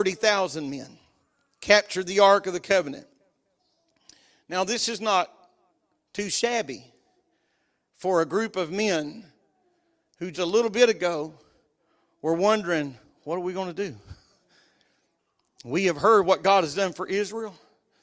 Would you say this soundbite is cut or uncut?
cut